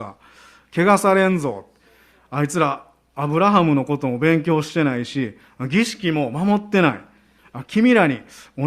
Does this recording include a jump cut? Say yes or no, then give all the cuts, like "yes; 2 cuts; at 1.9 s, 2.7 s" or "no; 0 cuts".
yes; 1 cut; at 7.4 s